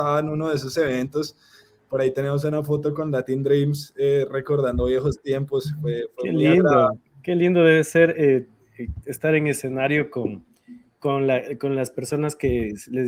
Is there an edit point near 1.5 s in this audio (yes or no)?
no